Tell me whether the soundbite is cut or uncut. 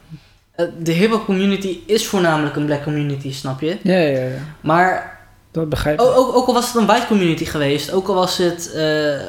uncut